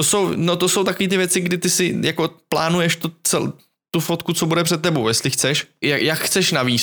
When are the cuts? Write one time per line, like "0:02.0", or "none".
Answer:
0:05.8